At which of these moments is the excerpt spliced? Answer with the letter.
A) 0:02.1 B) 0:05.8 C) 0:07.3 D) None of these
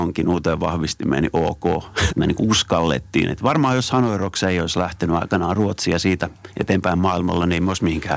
A